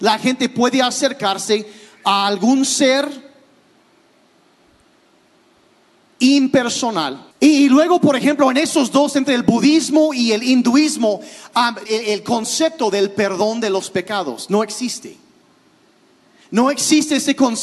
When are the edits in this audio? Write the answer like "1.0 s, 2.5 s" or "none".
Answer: 7.3 s, 11.9 s